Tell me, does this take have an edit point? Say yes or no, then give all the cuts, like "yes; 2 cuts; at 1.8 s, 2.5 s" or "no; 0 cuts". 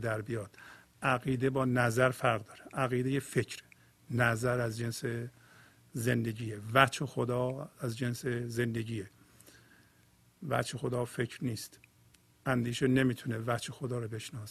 no; 0 cuts